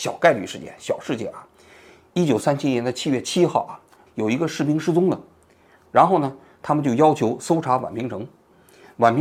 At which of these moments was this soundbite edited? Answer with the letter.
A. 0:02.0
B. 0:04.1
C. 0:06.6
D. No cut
B